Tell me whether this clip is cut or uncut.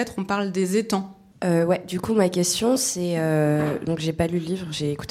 cut